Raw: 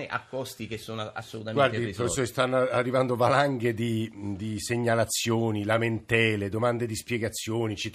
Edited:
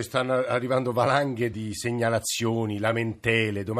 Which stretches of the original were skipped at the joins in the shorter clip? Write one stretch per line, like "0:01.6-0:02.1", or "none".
0:03.8-0:04.4